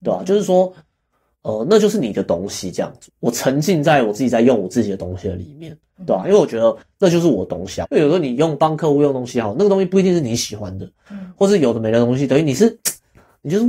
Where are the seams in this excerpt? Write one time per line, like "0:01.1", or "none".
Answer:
0:03.1
0:07.8